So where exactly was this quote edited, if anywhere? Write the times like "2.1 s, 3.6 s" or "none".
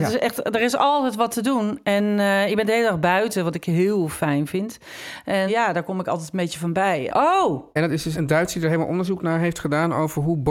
5.5 s, 7.1 s, 8.1 s